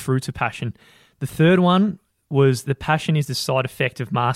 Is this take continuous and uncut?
yes; 0 cuts

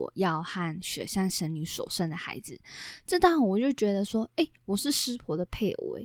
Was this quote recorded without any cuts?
yes; 0 cuts

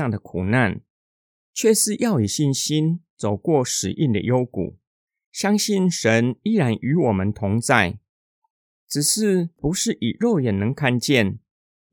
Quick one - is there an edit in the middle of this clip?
yes; 1 cut; at 1.4 s

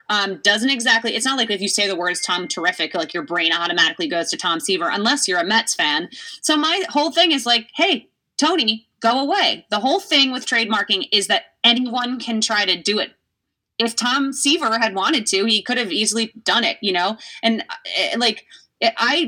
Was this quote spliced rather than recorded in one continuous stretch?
no; 0 cuts

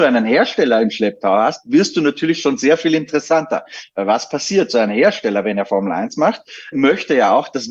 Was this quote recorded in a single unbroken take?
no; 1 cut; at 6.7 s

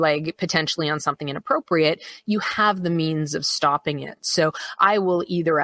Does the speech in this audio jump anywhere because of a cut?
no; 0 cuts

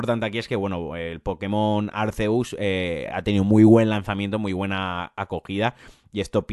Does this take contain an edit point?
no; 0 cuts

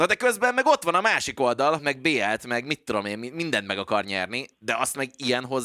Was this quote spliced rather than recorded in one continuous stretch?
yes; 1 cut; at 1.8 s

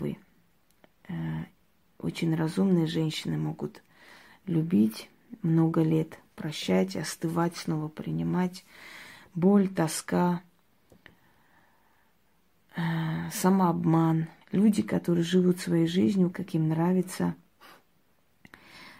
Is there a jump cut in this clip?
yes; 2 cuts; at 14.4 s, 16.3 s

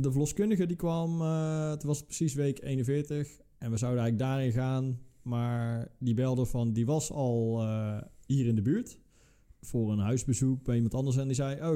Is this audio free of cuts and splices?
yes; 0 cuts

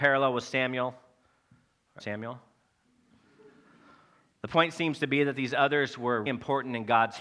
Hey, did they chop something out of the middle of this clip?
yes; 2 cuts; at 2.0 s, 6.3 s

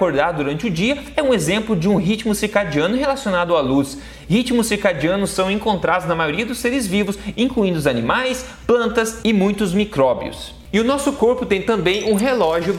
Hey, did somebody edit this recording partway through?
no; 0 cuts

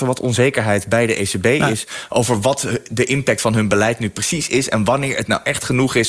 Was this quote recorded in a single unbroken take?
yes; 0 cuts

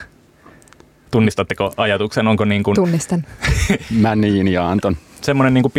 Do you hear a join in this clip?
no; 0 cuts

